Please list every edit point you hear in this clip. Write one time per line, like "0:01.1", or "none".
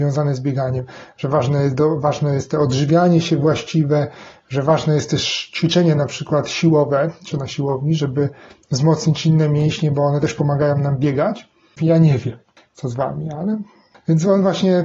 0:11.8